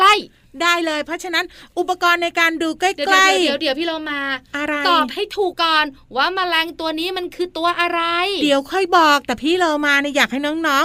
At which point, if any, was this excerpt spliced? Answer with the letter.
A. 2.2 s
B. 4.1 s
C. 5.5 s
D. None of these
C